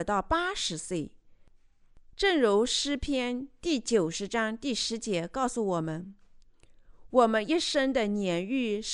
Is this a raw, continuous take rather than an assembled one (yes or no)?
no